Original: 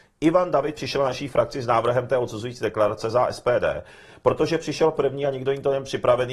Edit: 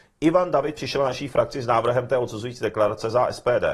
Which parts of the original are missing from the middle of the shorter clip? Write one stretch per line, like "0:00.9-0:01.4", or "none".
none

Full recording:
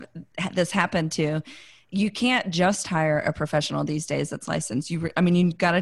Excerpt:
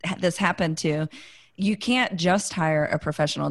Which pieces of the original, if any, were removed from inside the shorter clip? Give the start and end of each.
none

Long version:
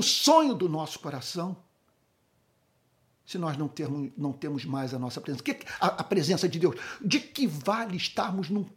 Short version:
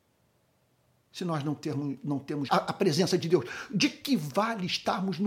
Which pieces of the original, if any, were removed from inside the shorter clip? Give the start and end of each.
0:04.6-0:05.8

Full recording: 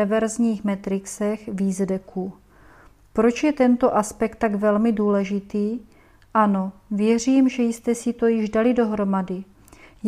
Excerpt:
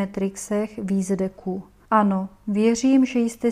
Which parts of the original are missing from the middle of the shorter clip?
0:02.6-0:06.3

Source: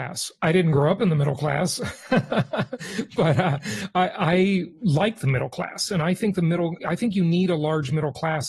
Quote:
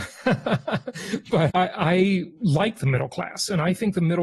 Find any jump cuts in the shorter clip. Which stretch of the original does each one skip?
0:03.4-0:03.9

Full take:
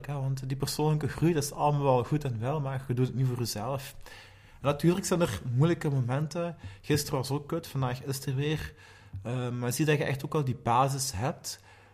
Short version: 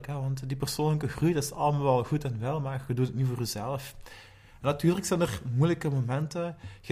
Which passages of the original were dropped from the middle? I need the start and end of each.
none

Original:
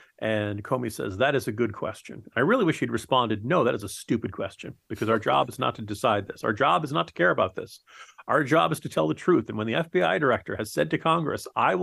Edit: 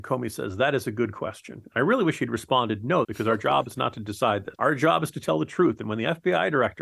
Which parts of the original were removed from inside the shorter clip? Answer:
0:03.6-0:04.8
0:06.4-0:08.2

